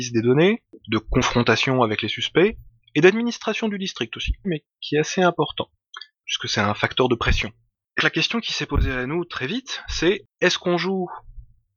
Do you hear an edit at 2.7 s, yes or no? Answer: no